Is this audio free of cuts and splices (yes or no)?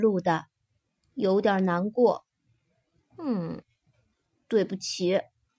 yes